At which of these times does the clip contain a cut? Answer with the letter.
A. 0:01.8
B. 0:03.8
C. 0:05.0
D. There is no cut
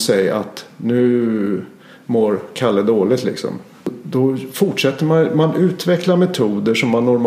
D